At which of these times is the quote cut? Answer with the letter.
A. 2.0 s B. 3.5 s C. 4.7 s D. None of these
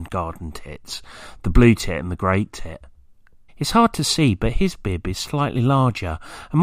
B